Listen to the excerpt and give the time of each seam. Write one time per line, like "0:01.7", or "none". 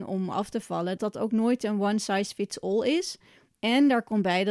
0:01.0
0:03.5